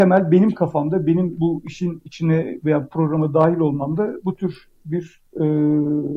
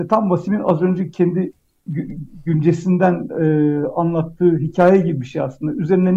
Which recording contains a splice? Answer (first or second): second